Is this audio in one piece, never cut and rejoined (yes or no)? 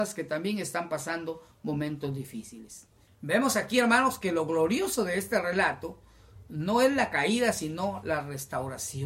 no